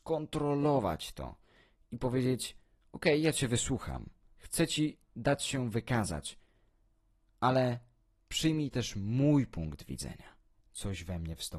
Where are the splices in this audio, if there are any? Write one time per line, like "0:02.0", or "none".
0:04.2
0:10.6